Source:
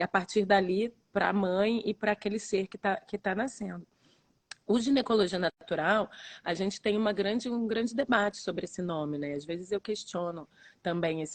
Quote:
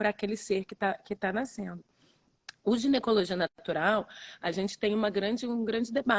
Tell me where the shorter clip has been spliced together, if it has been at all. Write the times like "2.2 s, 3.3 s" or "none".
none